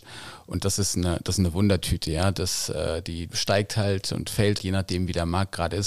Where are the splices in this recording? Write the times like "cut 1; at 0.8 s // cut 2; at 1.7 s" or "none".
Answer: cut 1; at 4.6 s